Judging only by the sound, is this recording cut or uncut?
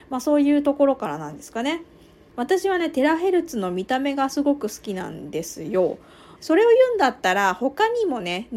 cut